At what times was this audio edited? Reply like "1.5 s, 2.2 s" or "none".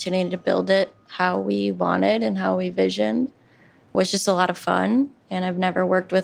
3.9 s